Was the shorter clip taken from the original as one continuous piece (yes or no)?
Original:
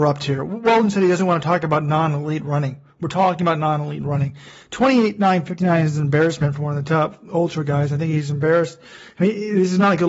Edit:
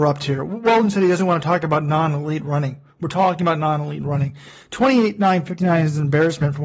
yes